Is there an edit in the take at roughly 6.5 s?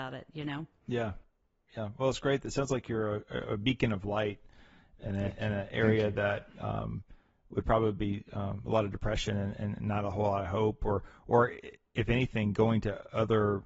no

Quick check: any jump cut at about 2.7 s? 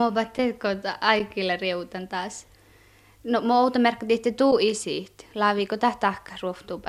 no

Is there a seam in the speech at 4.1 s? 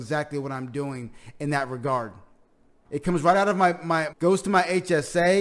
yes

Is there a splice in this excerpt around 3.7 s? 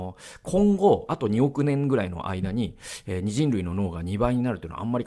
no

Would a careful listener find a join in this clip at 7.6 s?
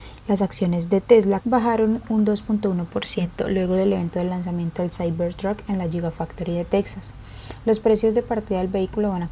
no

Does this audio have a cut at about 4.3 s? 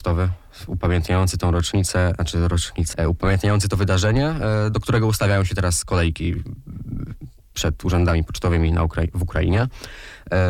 no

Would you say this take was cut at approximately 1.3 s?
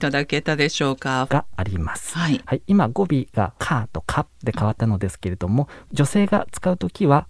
yes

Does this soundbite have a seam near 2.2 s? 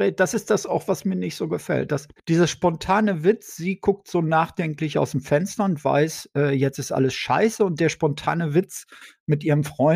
yes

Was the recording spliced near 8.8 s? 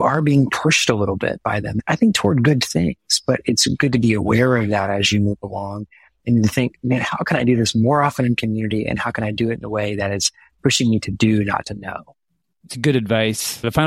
no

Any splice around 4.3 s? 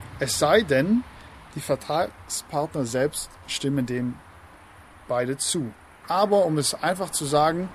no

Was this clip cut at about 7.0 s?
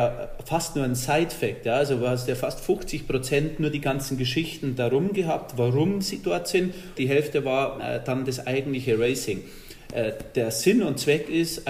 yes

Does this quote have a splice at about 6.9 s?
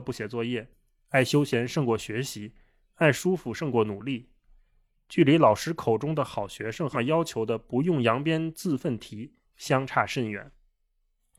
yes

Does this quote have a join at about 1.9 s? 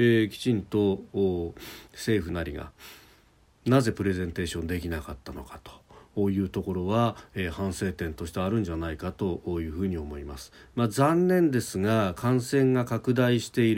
yes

